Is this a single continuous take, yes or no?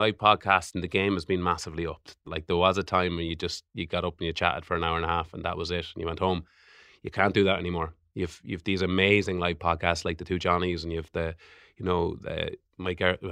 no